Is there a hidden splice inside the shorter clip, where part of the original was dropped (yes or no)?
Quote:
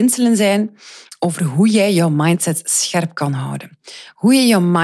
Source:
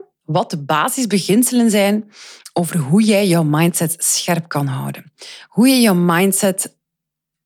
no